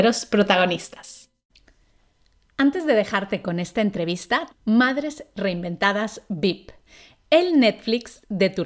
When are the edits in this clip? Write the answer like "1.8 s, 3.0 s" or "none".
4.5 s